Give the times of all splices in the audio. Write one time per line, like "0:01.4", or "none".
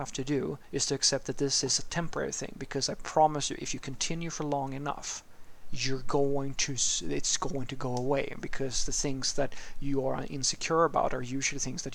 none